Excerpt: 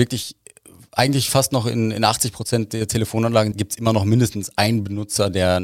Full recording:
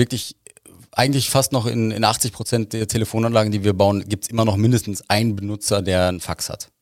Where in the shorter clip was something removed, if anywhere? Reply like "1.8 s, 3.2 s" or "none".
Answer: 3.5 s